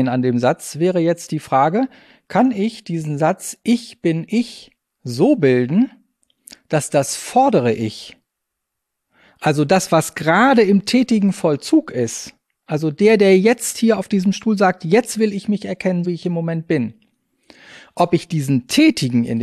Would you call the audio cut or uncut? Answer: cut